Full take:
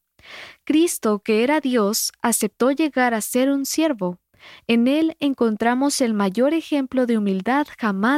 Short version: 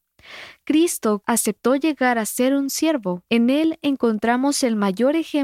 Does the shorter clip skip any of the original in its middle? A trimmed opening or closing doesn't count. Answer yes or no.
yes